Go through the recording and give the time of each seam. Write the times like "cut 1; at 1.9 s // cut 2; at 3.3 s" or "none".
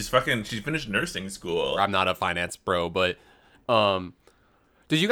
cut 1; at 1.8 s